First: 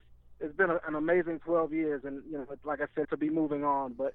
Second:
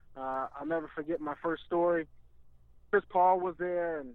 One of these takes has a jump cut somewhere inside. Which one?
first; 1 cut; at 3.0 s

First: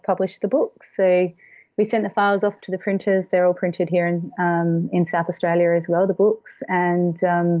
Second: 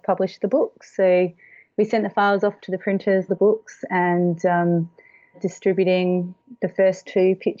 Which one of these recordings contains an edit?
second; 2 cuts; at 3.3 s, 5.3 s

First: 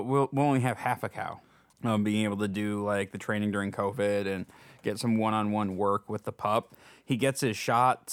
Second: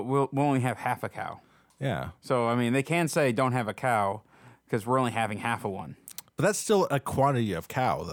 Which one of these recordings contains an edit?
first; 1 cut; at 1.7 s

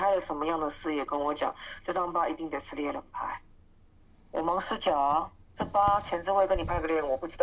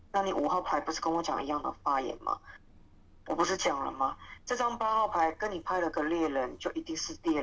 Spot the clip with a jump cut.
second; 1 cut; at 4.4 s

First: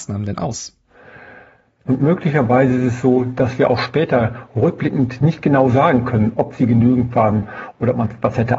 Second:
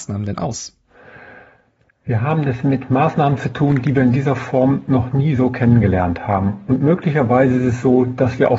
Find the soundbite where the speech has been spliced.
first; 1 cut; at 1.9 s

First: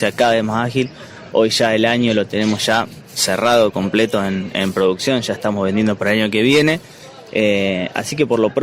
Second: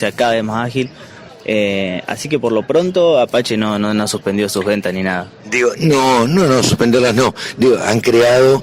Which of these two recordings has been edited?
second; 1 cut; at 1.3 s

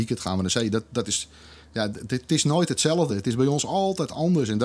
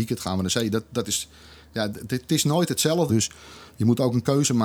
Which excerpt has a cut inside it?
second; 1 cut; at 3.1 s

